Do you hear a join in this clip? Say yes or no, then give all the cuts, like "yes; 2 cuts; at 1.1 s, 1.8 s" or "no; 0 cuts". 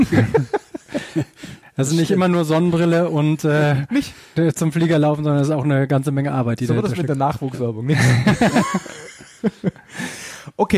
no; 0 cuts